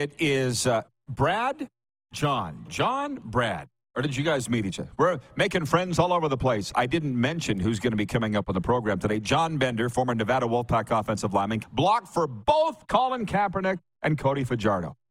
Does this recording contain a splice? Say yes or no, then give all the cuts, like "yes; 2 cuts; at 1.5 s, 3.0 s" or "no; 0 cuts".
yes; 1 cut; at 11.6 s